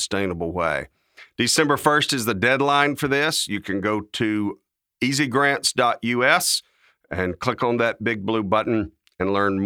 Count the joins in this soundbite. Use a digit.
0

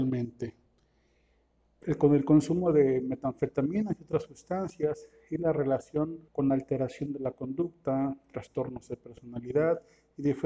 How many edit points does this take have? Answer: 2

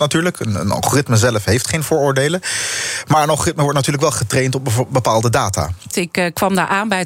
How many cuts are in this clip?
1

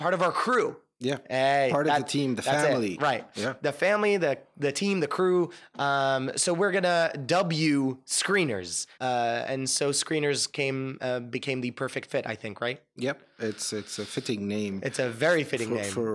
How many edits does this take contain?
1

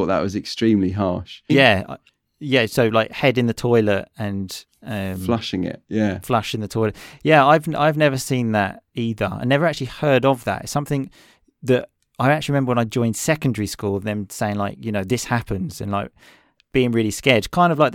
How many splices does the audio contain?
1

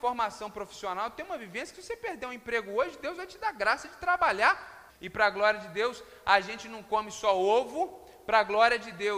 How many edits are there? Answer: 1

